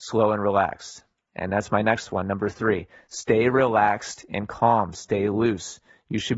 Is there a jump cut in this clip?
no; 0 cuts

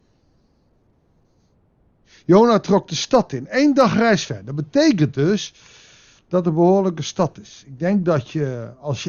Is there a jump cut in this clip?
no; 0 cuts

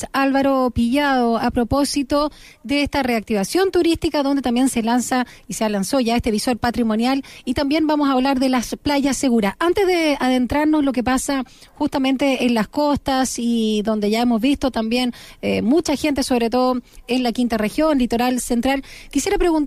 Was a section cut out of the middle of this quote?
no; 0 cuts

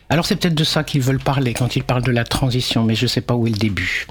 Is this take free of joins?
yes; 0 cuts

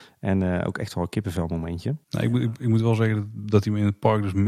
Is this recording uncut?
no; 1 cut; at 2.0 s

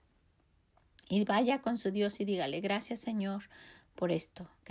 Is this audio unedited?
yes; 0 cuts

